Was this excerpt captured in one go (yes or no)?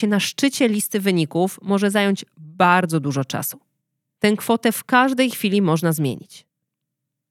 no